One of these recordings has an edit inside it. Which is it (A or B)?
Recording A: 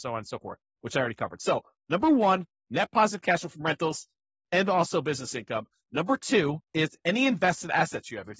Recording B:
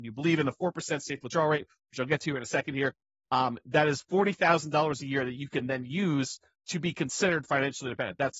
A